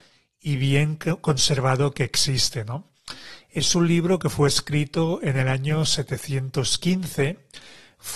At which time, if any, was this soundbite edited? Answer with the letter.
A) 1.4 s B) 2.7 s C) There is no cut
C